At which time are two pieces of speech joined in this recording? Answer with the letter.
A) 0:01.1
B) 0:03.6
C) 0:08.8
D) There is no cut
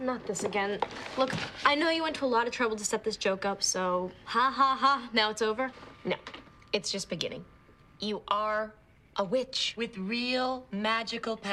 D